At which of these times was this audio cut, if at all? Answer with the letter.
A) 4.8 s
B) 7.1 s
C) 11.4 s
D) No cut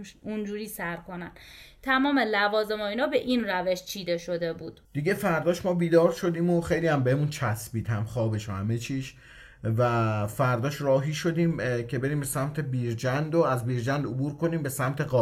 A